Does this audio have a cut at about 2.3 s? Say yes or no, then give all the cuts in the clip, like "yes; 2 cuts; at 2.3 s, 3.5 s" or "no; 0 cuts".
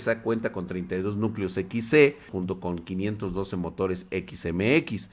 yes; 1 cut; at 2.3 s